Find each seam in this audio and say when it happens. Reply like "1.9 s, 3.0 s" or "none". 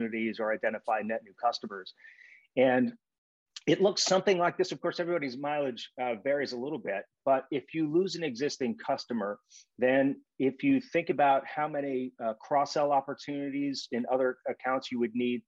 none